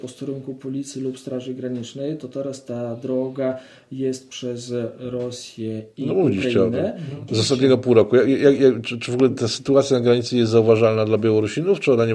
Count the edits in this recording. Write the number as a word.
one